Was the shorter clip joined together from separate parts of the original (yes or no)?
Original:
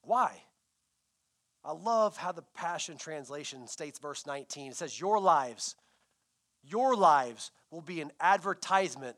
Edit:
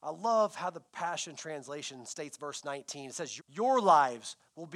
yes